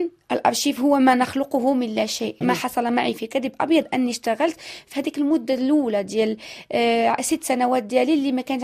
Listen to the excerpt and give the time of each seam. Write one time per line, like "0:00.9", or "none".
0:02.4